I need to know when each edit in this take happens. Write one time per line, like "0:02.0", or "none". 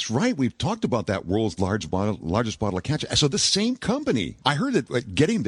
0:04.4